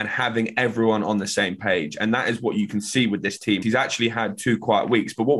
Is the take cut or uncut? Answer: cut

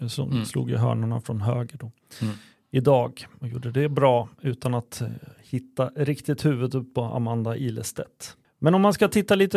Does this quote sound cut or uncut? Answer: uncut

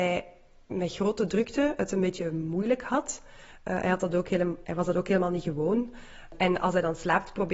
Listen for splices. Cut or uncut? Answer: cut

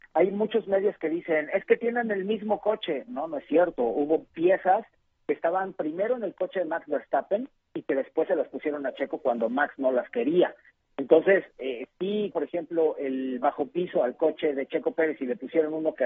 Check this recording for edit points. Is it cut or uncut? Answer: cut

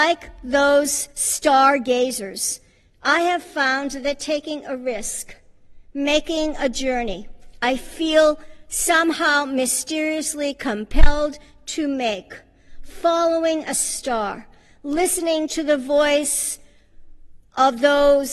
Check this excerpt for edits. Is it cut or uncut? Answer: uncut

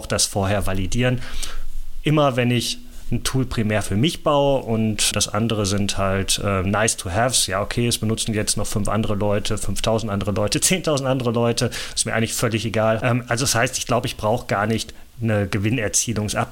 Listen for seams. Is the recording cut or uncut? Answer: cut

